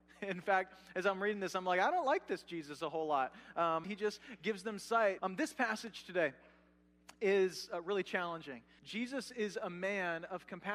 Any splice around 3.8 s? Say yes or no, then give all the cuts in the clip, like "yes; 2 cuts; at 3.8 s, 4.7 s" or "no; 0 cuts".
yes; 3 cuts; at 3.8 s, 5.2 s, 8.8 s